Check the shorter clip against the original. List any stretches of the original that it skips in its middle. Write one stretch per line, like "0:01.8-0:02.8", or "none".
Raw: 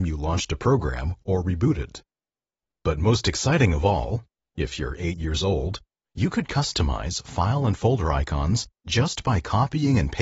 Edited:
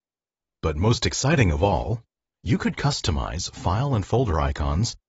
0:04.5-0:06.0